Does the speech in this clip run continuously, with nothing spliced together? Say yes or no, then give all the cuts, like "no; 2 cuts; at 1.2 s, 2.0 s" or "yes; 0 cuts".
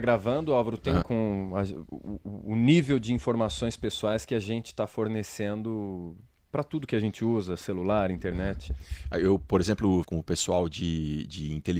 no; 2 cuts; at 1.0 s, 10.0 s